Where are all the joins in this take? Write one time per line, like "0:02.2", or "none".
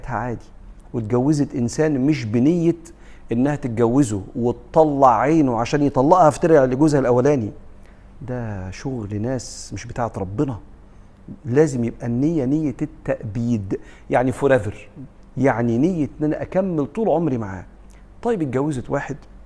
none